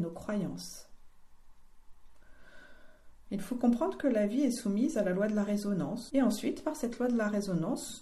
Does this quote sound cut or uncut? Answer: cut